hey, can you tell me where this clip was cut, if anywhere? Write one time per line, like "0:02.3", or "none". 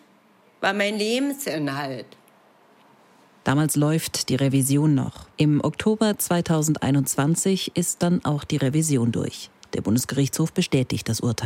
0:05.3